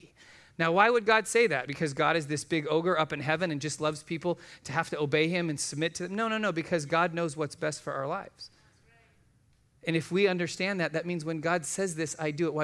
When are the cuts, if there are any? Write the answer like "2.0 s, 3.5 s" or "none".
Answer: none

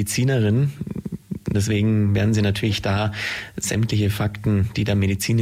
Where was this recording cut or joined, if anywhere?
1.5 s

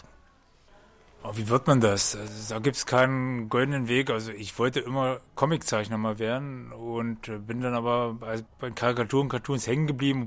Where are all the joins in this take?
none

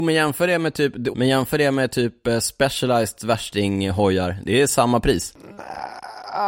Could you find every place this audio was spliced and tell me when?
1.1 s

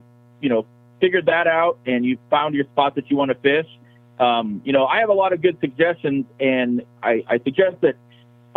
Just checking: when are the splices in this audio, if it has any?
none

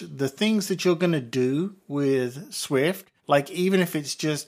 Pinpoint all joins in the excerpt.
3.2 s

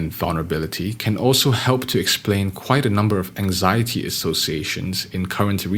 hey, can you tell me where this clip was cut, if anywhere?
none

